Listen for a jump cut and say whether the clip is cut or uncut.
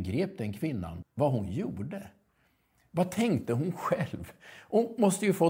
cut